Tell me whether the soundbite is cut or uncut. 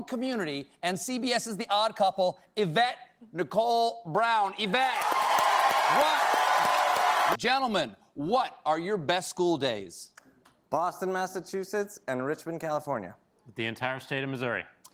cut